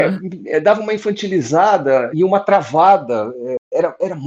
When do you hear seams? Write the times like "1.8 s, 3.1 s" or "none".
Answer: 2.1 s